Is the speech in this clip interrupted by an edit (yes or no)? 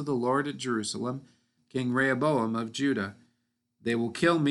yes